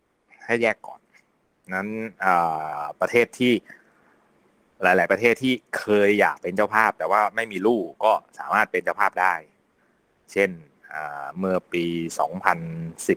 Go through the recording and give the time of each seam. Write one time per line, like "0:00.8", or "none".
none